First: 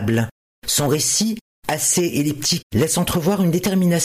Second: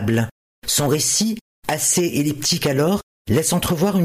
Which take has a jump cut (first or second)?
first